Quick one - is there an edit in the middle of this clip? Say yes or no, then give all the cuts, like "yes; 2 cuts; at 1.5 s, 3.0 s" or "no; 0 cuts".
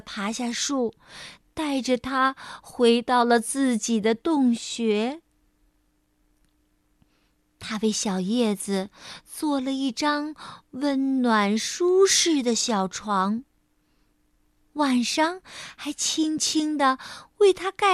no; 0 cuts